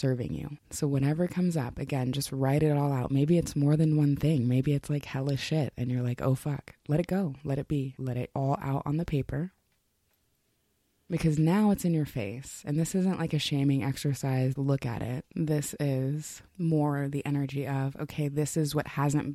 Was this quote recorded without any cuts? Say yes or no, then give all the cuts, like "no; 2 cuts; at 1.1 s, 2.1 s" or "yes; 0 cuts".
no; 2 cuts; at 14.6 s, 16.5 s